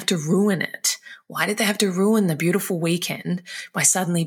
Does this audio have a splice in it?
no; 0 cuts

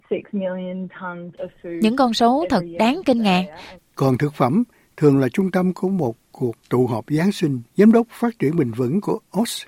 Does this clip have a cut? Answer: yes; 2 cuts; at 3.8 s, 7.7 s

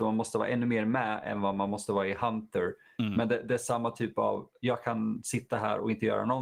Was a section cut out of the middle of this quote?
no; 0 cuts

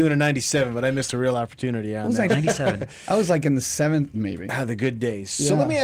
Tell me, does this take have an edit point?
yes; 2 cuts; at 2.3 s, 4.1 s

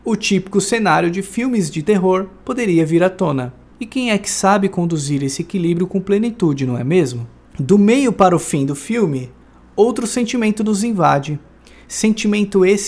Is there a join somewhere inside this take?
yes; 1 cut; at 3.7 s

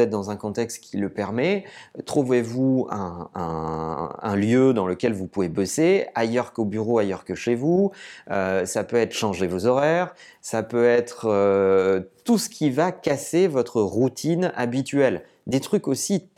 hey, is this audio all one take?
yes; 0 cuts

